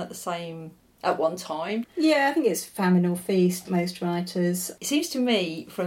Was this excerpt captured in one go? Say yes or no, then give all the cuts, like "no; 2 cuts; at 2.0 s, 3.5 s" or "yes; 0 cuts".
no; 3 cuts; at 1.8 s, 3.7 s, 4.8 s